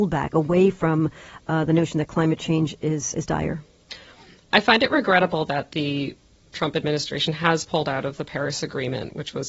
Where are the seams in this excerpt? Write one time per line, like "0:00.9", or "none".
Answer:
0:03.1

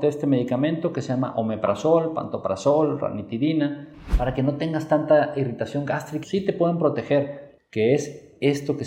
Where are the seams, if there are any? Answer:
0:06.2
0:07.6

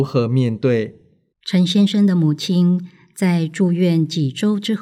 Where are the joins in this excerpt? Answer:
0:01.3

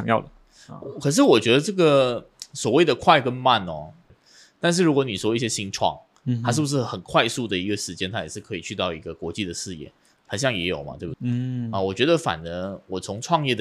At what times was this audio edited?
0:04.1
0:11.1

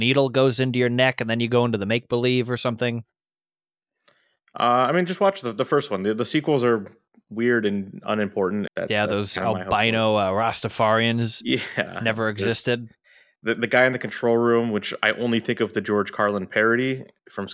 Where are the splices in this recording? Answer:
0:08.7

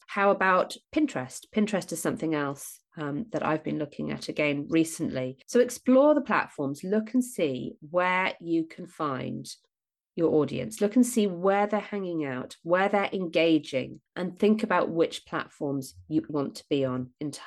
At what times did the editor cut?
0:14.1
0:16.3

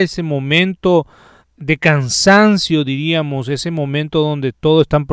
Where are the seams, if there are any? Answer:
none

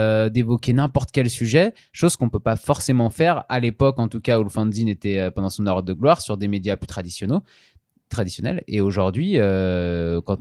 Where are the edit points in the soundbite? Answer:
none

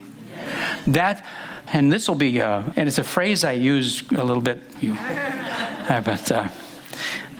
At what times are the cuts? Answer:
0:01.7
0:02.7
0:04.8

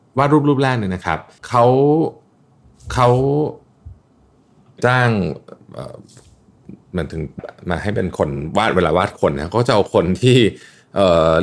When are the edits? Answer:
0:01.4
0:07.4

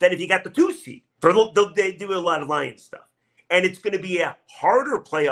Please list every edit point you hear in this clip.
0:01.2
0:03.4

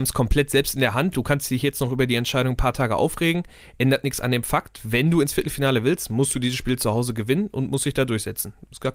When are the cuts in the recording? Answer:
none

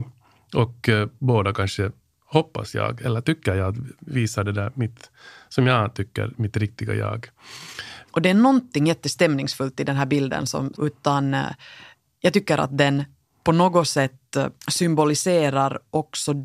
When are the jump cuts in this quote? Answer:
0:08.0
0:10.7
0:14.6

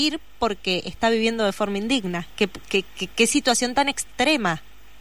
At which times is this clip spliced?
none

